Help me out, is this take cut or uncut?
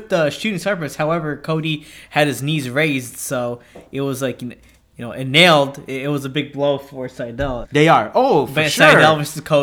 cut